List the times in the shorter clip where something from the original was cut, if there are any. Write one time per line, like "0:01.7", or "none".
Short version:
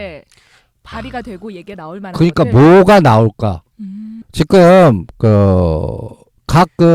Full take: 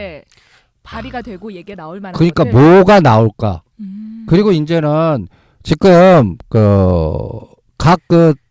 0:04.2